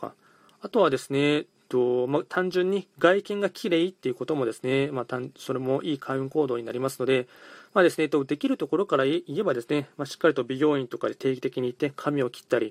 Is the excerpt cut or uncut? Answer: uncut